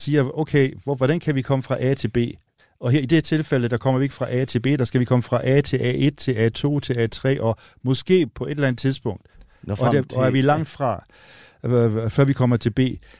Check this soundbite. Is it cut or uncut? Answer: uncut